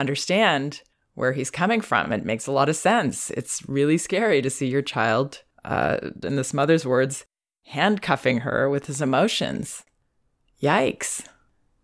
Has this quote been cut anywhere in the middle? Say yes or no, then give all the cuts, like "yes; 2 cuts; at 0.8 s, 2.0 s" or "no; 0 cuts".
no; 0 cuts